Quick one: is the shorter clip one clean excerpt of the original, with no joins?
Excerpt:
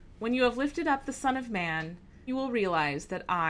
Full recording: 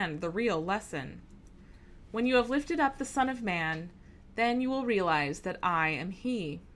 no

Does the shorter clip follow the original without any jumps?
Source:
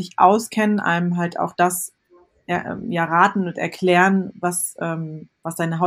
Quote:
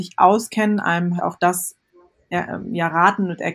no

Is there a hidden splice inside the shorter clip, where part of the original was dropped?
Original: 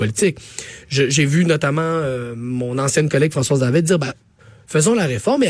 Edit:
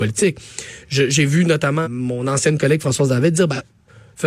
yes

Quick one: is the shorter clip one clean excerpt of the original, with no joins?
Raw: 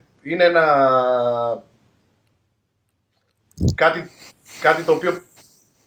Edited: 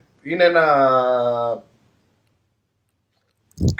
yes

